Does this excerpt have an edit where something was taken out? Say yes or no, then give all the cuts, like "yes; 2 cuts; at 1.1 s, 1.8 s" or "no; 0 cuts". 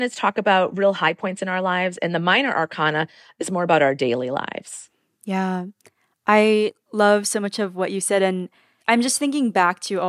yes; 1 cut; at 6.8 s